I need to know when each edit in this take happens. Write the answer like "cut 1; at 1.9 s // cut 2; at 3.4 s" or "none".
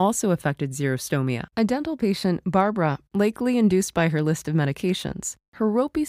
cut 1; at 1.5 s // cut 2; at 3.1 s